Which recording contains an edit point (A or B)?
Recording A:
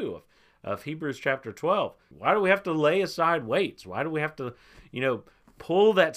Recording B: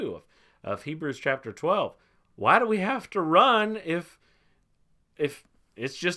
A